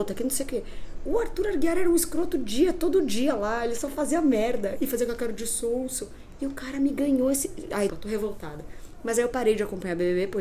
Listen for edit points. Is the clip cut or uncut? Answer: cut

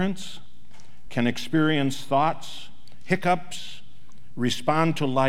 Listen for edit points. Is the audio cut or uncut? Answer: uncut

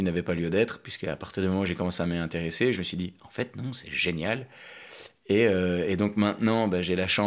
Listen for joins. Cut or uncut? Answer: uncut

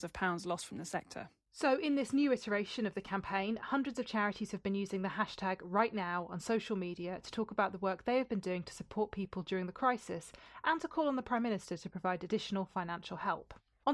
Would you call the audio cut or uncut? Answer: uncut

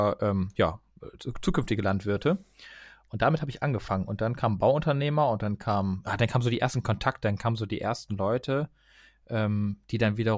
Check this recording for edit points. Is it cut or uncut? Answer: uncut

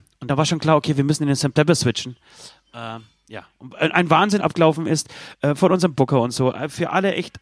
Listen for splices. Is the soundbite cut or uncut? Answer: cut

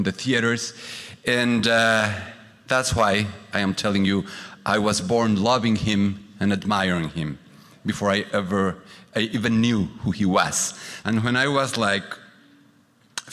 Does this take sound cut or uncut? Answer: cut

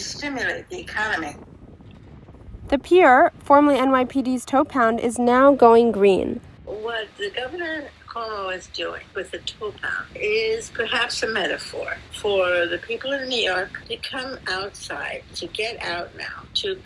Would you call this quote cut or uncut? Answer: cut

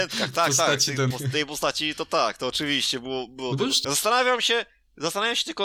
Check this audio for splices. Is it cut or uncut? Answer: cut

